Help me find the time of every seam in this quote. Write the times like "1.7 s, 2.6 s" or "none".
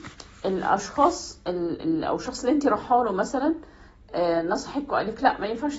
1.8 s

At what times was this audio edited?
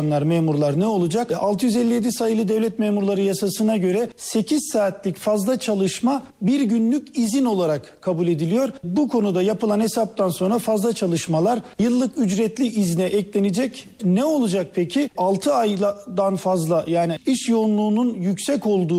14.0 s

